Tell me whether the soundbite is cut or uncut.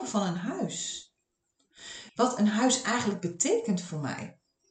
cut